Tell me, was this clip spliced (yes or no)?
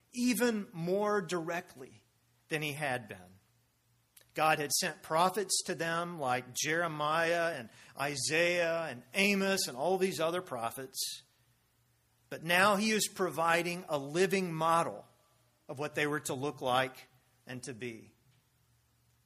no